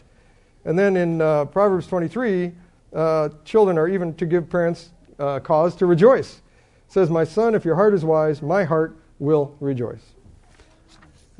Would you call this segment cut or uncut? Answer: uncut